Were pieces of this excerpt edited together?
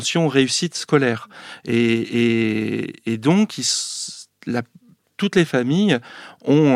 no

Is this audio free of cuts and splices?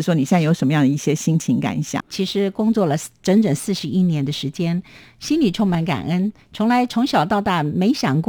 no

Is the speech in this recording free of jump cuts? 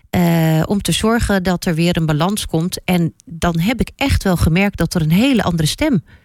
yes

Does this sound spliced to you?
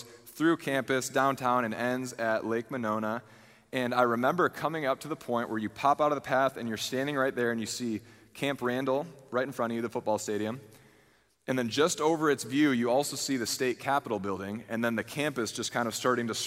no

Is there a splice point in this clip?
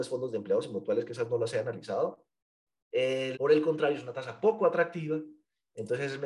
yes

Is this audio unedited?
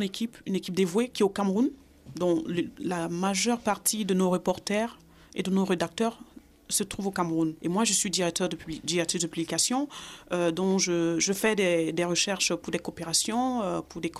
yes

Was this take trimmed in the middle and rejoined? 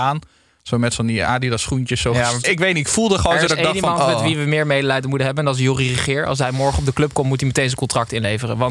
yes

